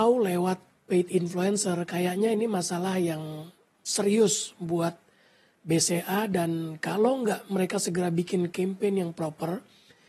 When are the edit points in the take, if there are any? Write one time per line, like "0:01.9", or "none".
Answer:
none